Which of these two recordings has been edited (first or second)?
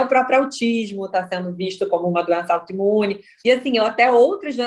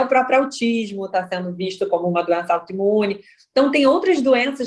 first